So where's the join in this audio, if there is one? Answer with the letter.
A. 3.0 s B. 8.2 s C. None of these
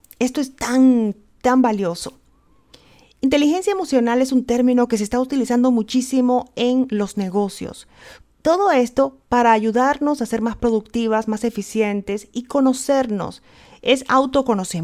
B